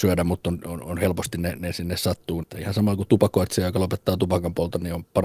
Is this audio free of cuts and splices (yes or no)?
no